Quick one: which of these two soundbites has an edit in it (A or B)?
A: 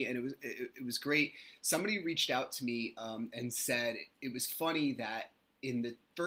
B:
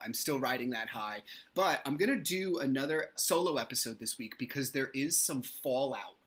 B